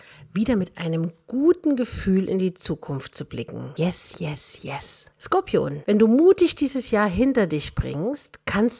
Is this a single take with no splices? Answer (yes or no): no